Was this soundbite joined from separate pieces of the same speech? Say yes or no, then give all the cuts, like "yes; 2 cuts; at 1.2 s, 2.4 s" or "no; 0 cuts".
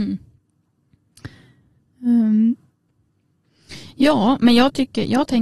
no; 0 cuts